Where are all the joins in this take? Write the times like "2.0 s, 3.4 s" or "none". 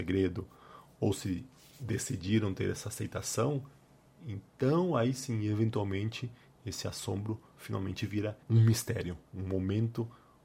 8.4 s